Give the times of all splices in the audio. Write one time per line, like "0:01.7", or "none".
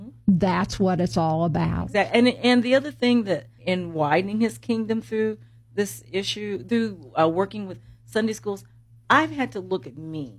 0:03.6